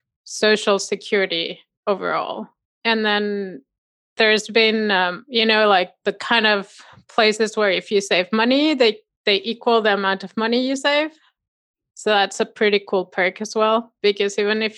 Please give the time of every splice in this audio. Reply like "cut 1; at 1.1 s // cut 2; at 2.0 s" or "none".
none